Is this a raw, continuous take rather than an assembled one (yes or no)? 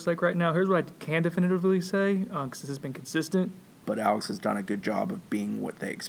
no